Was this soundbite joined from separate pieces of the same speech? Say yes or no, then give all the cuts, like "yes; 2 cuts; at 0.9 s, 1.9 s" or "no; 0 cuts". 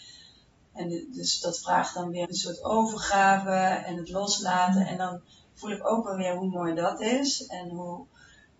yes; 1 cut; at 2.2 s